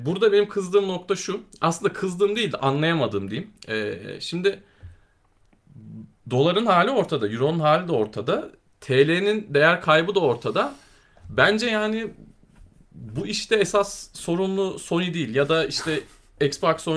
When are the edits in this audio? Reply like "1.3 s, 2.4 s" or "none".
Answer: none